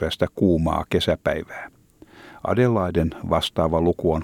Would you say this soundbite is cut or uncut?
uncut